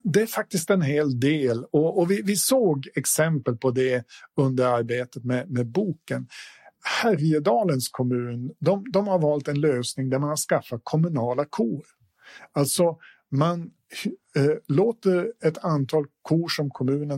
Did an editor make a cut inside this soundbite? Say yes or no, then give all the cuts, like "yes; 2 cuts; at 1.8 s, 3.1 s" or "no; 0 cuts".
no; 0 cuts